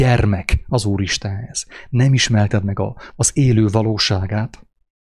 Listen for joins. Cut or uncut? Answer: cut